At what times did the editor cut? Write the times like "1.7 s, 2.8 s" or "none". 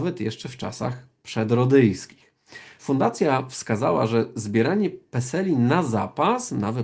none

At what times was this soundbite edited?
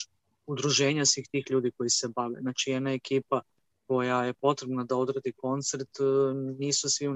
none

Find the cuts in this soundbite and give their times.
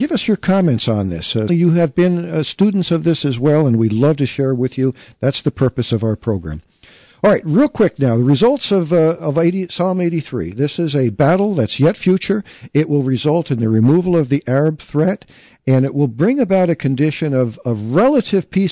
1.5 s

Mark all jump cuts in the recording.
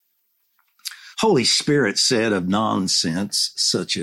1.1 s

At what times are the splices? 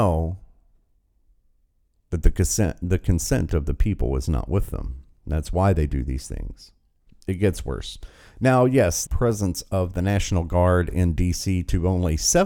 7.1 s, 9.1 s

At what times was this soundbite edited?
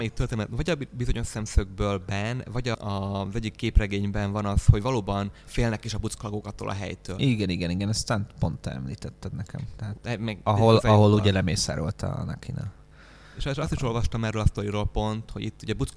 10.0 s

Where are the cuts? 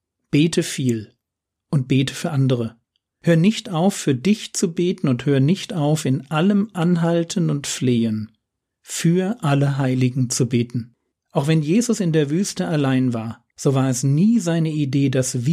11.1 s, 13.5 s

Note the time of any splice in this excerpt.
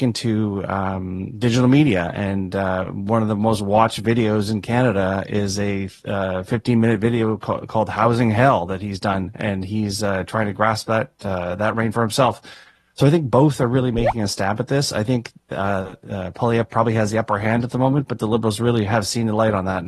none

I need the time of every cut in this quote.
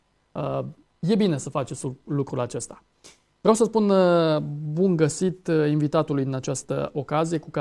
none

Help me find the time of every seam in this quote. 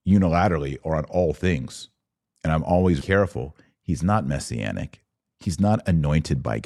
3.0 s

